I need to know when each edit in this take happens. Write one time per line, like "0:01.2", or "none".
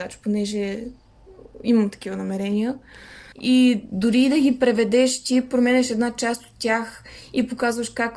0:03.3